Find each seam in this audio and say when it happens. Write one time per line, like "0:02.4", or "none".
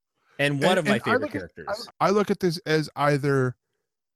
0:01.9